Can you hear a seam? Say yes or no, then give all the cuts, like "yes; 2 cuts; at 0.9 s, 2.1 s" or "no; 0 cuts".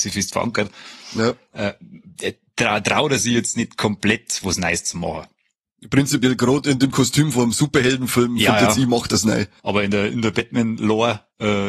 yes; 1 cut; at 9.6 s